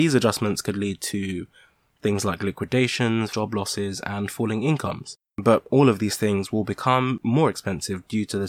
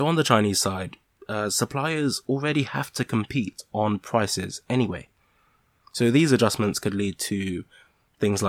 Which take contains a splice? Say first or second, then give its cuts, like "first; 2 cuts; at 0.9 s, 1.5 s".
first; 2 cuts; at 3.3 s, 5.3 s